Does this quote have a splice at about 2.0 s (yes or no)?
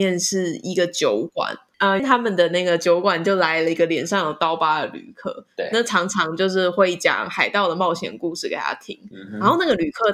yes